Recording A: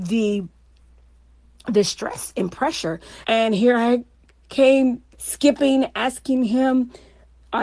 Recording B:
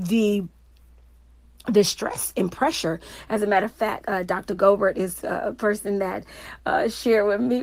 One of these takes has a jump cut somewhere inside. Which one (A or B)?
A